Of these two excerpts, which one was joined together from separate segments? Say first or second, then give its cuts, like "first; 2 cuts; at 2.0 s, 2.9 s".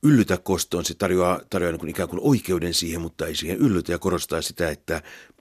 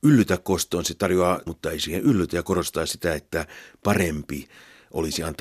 second; 1 cut; at 1.5 s